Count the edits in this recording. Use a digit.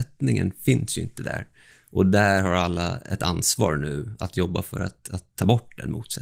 0